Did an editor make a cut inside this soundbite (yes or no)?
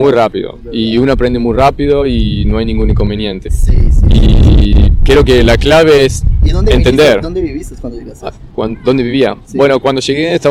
yes